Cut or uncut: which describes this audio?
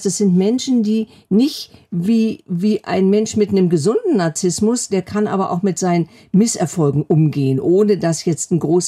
cut